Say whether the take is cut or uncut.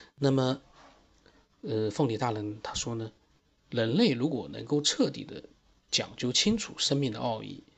uncut